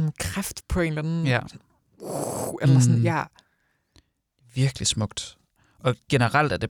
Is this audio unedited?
yes; 0 cuts

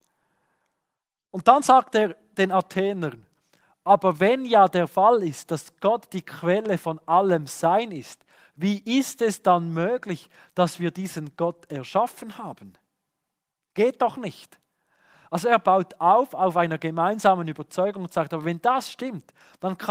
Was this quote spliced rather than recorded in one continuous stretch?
no; 0 cuts

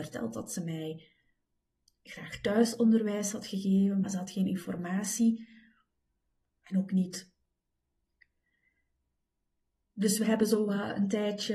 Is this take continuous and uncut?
no; 1 cut; at 4.0 s

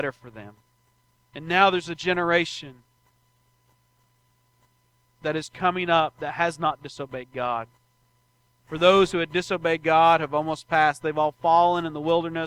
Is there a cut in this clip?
no; 0 cuts

